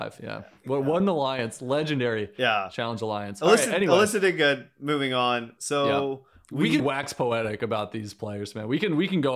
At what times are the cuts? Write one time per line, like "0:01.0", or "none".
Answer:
0:05.6
0:06.8

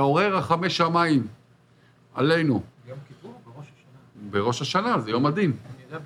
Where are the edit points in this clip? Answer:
0:02.7

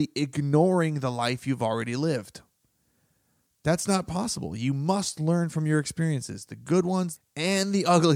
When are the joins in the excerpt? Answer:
0:07.2

